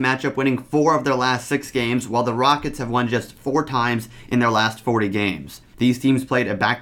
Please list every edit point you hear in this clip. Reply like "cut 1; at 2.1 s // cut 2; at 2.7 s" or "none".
cut 1; at 5.7 s